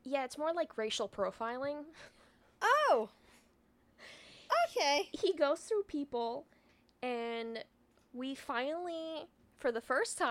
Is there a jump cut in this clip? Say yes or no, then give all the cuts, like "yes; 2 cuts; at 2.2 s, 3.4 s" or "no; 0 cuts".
no; 0 cuts